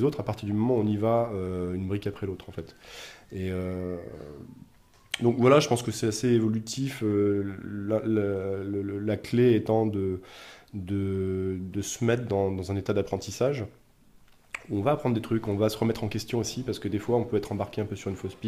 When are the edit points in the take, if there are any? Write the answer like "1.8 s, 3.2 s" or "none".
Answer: none